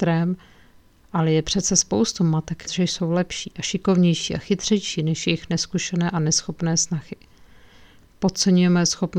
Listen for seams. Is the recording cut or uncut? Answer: cut